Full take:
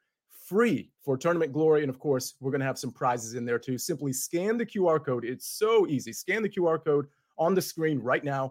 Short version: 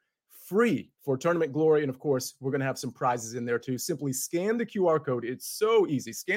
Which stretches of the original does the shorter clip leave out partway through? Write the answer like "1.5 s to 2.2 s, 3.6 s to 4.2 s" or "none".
none